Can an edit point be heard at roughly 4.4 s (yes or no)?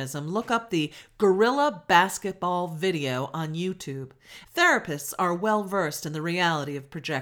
yes